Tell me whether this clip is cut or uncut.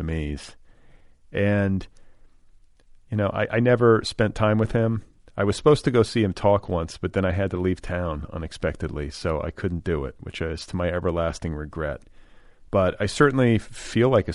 uncut